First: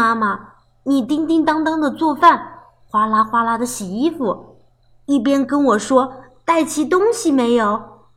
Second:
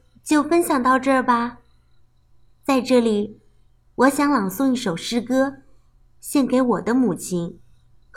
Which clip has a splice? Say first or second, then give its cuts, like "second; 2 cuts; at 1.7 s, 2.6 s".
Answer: second; 1 cut; at 2.5 s